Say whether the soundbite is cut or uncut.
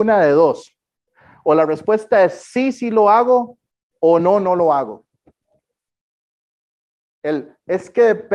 uncut